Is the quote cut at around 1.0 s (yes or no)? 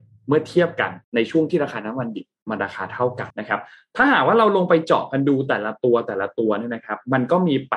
yes